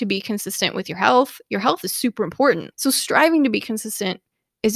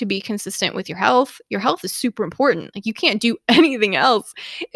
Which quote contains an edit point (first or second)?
first